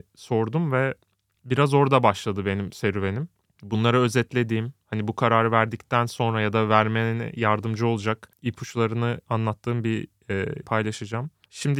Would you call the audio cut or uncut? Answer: cut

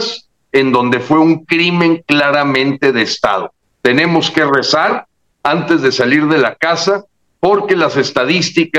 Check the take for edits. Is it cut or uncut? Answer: cut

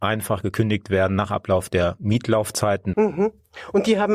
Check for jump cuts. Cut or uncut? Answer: cut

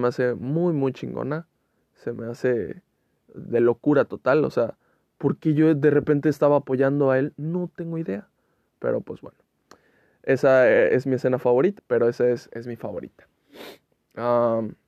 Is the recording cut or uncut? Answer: cut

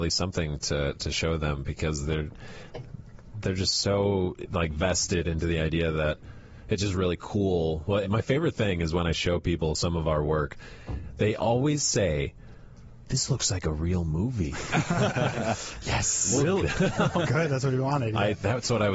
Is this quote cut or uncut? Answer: cut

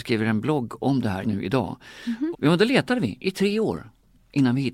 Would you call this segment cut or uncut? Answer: cut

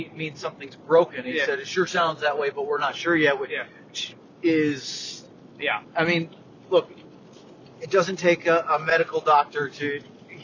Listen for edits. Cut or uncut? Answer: uncut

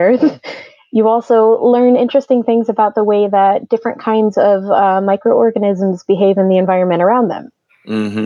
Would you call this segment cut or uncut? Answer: uncut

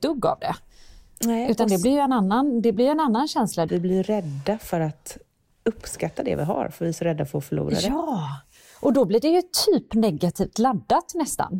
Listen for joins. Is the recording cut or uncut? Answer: cut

